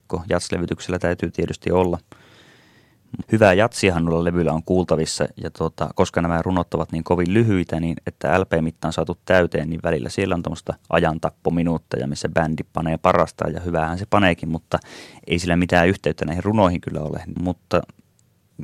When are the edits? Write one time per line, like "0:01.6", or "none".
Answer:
0:03.2
0:17.4